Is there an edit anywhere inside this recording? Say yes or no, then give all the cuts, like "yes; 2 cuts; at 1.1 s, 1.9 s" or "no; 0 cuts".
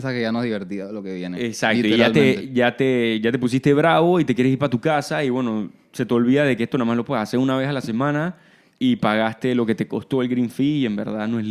no; 0 cuts